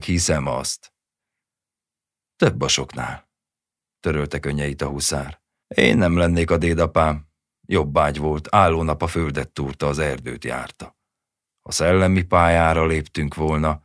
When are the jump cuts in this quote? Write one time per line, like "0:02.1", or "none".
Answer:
0:05.6
0:11.5